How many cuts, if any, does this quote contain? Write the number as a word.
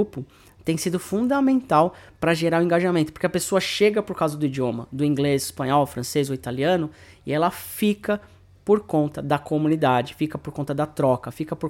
zero